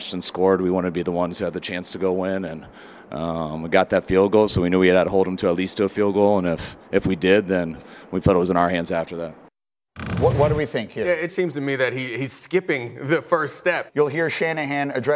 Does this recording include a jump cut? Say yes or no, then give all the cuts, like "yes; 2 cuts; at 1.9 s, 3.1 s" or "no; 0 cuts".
yes; 2 cuts; at 11.3 s, 13.9 s